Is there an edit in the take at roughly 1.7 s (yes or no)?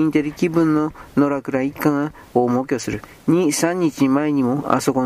no